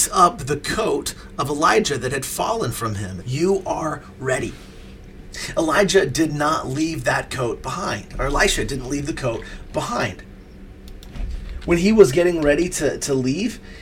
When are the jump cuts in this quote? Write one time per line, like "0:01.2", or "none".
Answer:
0:03.2